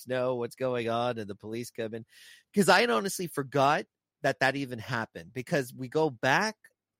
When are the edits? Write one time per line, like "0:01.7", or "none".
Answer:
none